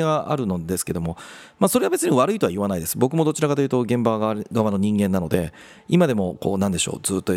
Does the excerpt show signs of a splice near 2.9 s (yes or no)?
no